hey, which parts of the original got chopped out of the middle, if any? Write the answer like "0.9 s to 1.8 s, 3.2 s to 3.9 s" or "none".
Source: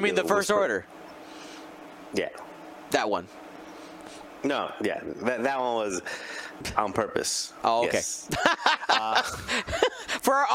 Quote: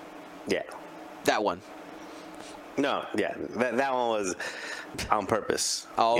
none